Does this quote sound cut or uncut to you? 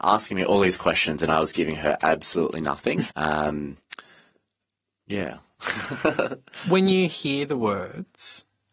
cut